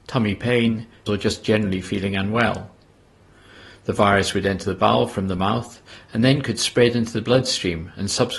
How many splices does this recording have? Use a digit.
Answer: 1